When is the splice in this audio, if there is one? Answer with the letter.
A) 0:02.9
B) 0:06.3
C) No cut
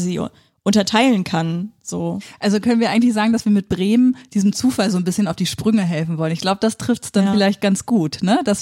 C